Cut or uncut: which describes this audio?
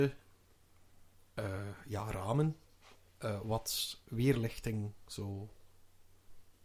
uncut